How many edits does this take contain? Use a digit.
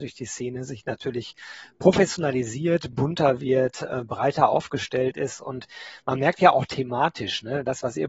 0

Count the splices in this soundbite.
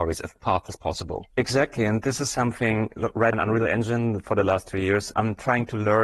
3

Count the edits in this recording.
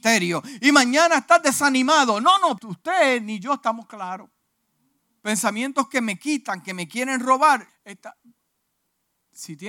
3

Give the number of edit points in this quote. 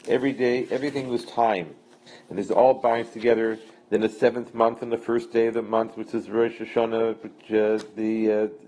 1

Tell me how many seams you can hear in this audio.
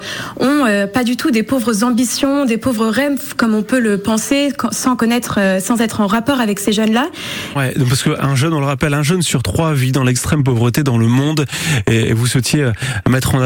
1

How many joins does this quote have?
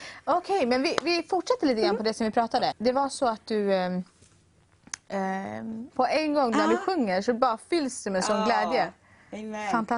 2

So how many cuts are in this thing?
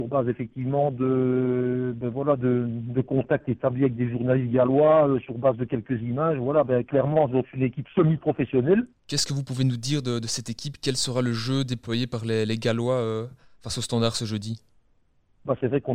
1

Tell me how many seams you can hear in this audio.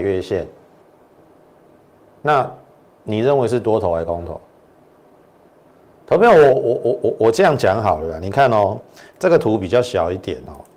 0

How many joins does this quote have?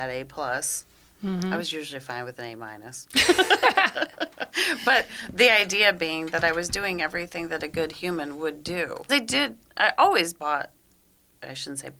1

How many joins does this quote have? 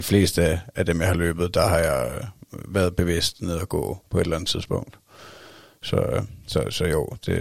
0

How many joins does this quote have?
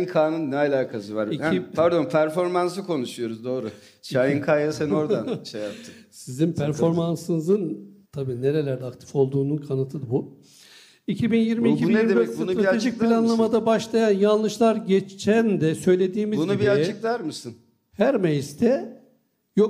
1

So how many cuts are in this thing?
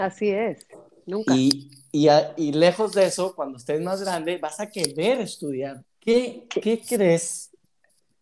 1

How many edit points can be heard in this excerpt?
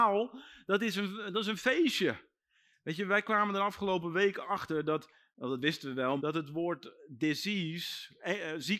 1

